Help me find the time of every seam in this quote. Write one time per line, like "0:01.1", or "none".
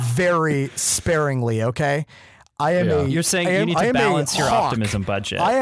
none